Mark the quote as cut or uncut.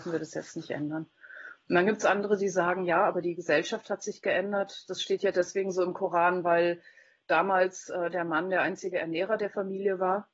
uncut